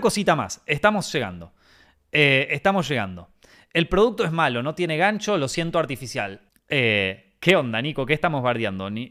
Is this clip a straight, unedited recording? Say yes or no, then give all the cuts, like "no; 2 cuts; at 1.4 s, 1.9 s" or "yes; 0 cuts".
no; 1 cut; at 6.5 s